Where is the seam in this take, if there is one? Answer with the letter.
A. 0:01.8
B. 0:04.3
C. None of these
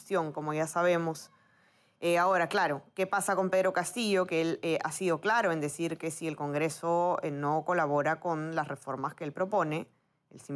C